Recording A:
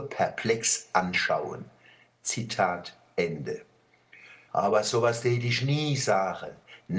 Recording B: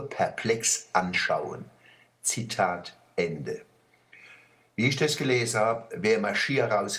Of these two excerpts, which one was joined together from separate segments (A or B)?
A